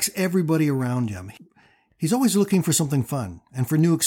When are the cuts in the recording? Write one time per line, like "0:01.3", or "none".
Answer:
none